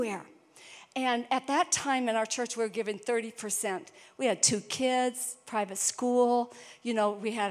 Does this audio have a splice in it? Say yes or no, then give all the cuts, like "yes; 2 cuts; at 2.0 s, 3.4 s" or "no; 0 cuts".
no; 0 cuts